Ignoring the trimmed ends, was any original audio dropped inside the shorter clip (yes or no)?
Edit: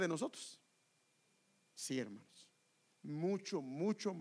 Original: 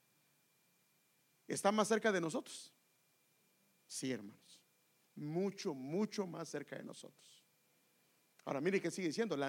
no